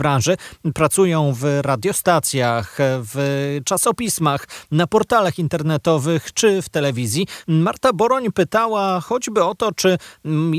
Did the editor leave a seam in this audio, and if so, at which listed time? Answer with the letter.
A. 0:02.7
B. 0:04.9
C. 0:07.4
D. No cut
C